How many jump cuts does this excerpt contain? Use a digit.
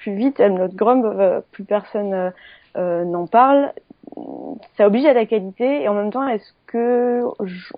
0